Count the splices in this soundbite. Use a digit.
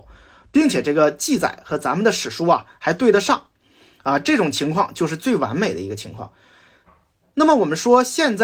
0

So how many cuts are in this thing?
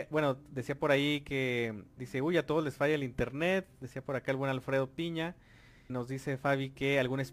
2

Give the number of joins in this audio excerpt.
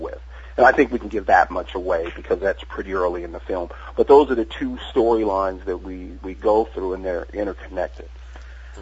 0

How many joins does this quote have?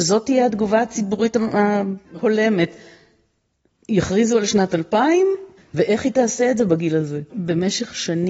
3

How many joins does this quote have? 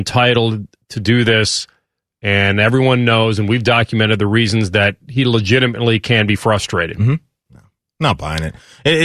1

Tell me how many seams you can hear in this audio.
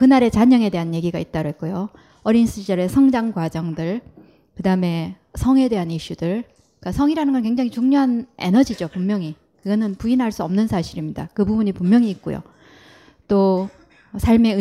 0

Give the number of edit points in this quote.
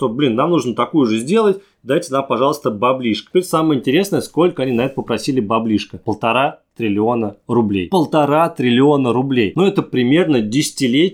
0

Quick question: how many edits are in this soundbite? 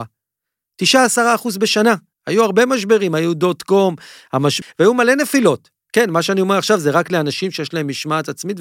3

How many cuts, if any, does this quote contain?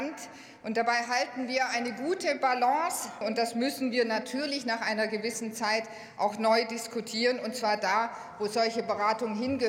1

